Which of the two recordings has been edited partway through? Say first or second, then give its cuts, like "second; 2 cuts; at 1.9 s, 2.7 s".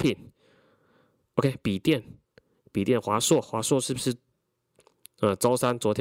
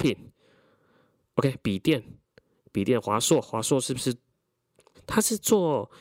second; 1 cut; at 4.9 s